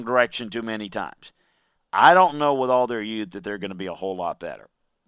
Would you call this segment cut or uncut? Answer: uncut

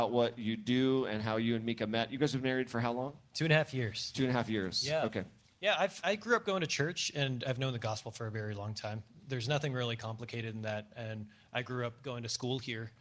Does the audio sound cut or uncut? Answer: cut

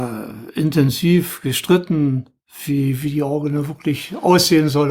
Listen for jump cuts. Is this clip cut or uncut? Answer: uncut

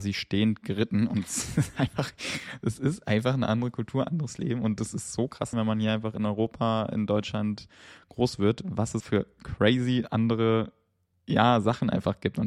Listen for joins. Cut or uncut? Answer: cut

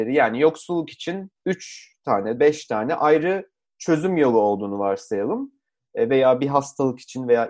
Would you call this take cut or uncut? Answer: cut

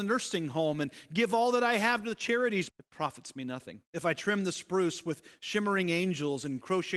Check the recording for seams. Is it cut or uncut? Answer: cut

